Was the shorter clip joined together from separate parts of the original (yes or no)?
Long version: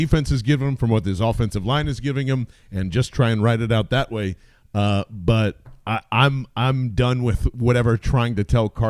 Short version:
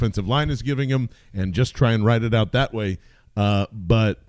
no